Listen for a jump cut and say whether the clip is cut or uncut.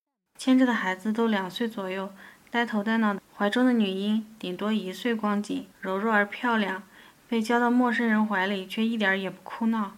cut